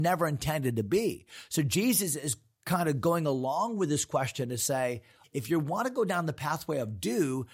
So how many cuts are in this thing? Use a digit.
1